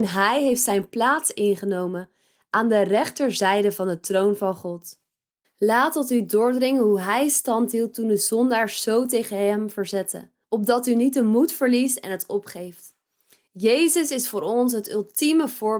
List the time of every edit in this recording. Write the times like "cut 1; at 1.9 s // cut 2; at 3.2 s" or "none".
cut 1; at 10.4 s